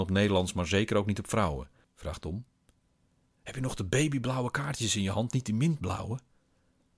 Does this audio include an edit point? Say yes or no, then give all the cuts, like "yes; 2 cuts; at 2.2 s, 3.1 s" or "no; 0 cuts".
yes; 1 cut; at 1.8 s